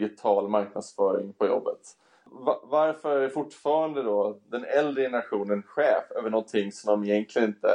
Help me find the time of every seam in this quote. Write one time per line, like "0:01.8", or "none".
none